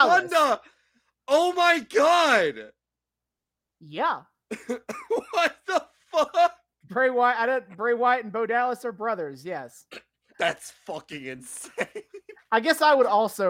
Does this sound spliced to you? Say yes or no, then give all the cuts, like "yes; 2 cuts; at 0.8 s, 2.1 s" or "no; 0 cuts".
yes; 1 cut; at 10.3 s